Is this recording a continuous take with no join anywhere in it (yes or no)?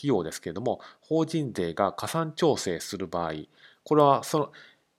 yes